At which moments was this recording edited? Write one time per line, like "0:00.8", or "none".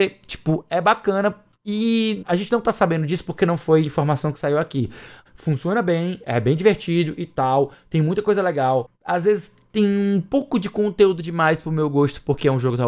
0:05.3